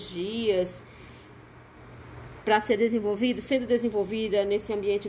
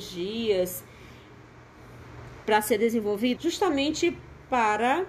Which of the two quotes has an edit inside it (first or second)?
second